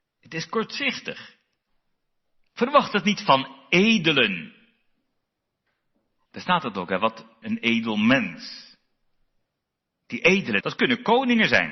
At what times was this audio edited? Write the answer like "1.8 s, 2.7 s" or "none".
6.2 s, 7.4 s, 10.6 s